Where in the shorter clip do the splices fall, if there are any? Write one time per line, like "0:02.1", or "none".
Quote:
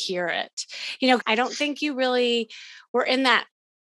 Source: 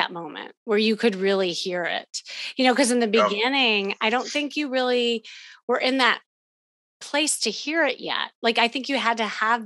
0:01.2